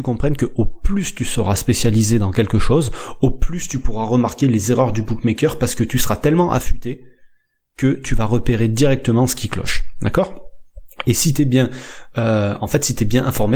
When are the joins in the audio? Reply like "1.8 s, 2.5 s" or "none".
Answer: none